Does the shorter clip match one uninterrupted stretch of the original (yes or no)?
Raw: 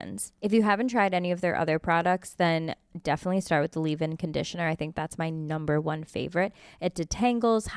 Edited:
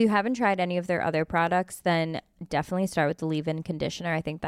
yes